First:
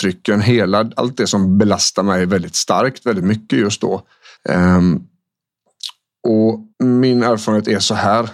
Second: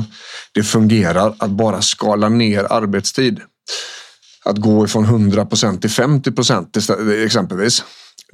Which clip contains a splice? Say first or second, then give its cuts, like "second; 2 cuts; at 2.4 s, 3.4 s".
first; 2 cuts; at 4.4 s, 6.7 s